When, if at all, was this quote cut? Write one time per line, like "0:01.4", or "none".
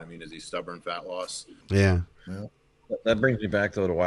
0:01.6